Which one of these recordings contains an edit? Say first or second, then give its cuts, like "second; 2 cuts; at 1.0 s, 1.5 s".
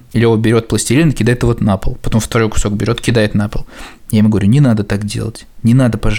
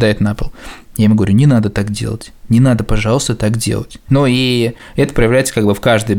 second; 1 cut; at 4.1 s